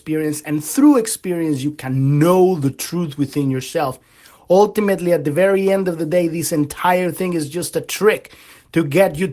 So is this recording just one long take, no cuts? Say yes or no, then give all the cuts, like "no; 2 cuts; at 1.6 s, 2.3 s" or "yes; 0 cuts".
yes; 0 cuts